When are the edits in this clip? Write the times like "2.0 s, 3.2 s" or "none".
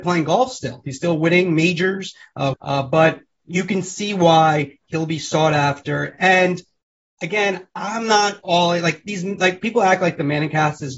2.5 s

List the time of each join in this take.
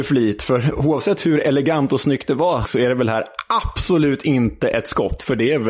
2.6 s

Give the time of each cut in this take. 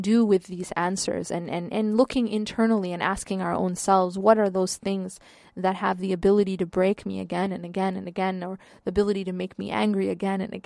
none

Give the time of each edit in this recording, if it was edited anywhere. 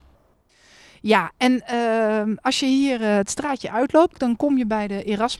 none

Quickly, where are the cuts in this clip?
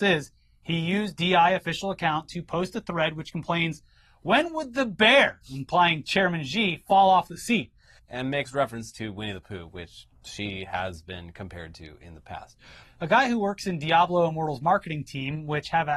8.0 s, 12.8 s

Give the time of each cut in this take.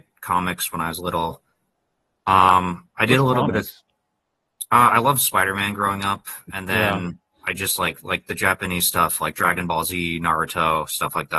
none

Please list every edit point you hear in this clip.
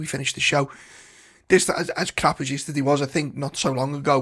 none

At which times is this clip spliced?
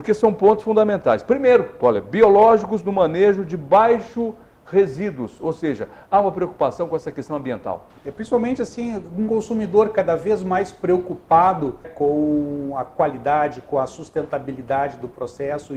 1.8 s, 7.9 s, 11.8 s

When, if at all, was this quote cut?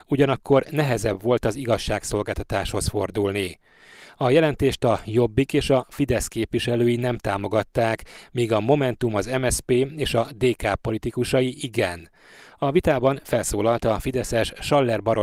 none

